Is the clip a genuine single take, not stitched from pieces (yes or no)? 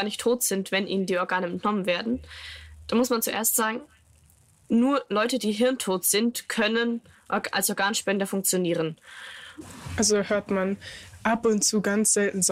yes